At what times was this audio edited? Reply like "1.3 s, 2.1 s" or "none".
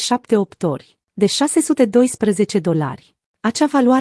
1.0 s

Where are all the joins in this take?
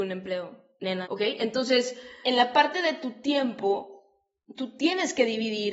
1.0 s, 2.2 s

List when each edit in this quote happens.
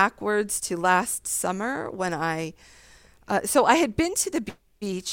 none

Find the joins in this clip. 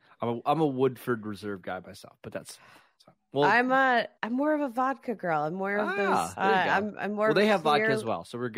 4.2 s, 6.4 s

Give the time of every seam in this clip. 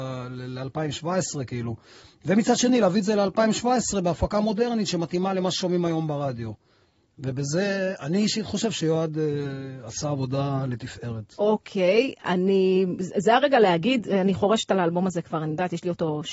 none

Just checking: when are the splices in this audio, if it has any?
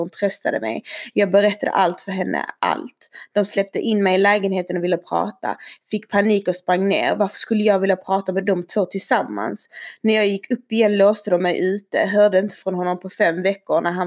none

